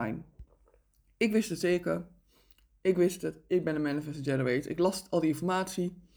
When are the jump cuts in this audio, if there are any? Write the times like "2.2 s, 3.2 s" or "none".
none